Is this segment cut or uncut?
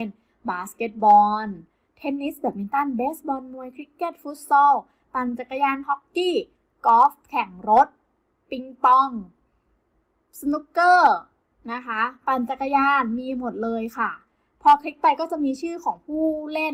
uncut